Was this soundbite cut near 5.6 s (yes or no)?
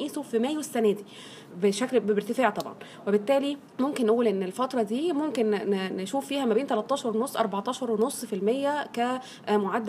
no